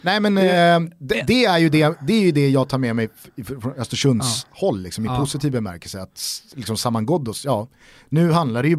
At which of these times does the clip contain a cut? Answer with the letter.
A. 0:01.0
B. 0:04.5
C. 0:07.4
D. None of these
D